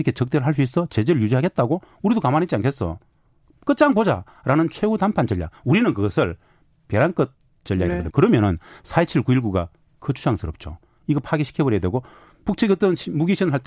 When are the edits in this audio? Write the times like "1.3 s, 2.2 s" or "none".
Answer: 8.1 s